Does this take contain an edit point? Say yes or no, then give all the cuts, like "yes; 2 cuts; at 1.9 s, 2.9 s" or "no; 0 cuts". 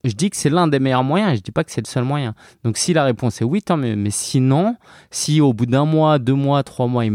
no; 0 cuts